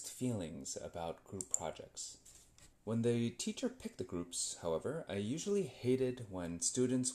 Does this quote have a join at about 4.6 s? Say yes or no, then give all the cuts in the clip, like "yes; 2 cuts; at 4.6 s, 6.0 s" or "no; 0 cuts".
no; 1 cut; at 2.7 s